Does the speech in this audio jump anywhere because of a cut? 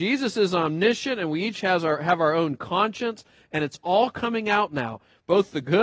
no; 0 cuts

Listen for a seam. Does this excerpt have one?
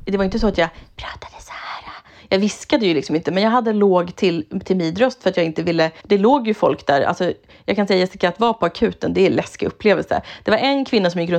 yes; 1 cut; at 6.0 s

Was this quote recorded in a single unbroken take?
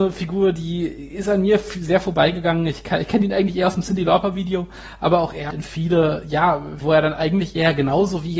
no; 2 cuts; at 5.5 s, 6.8 s

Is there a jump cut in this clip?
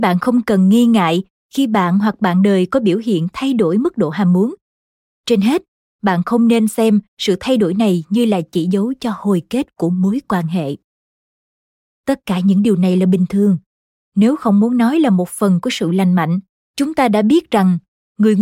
yes; 3 cuts; at 5.1 s, 11.9 s, 16.6 s

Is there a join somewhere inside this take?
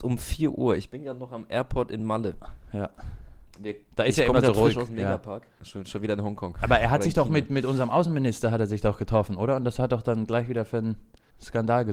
yes; 1 cut; at 5.6 s

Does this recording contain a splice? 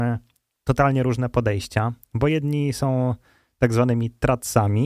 no; 0 cuts

